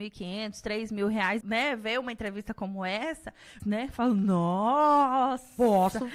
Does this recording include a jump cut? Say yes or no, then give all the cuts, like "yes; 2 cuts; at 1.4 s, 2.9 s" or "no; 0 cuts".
yes; 2 cuts; at 1.4 s, 3.6 s